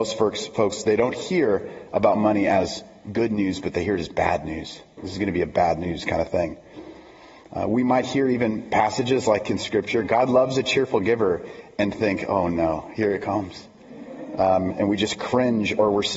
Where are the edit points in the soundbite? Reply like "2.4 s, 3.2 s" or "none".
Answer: none